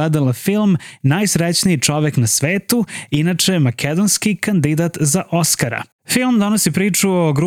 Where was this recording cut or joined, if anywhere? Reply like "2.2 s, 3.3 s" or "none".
none

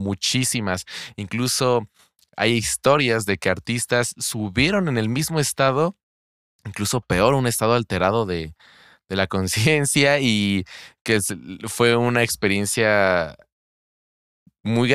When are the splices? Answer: none

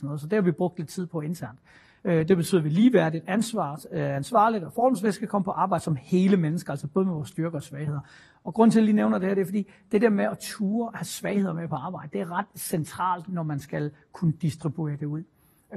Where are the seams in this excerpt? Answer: 2.0 s

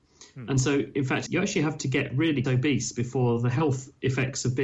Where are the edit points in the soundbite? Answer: 1.3 s, 2.4 s

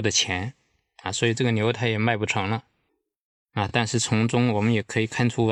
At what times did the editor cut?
none

